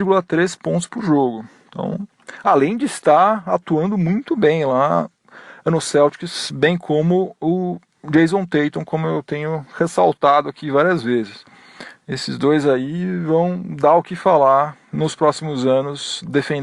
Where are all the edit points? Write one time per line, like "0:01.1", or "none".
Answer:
none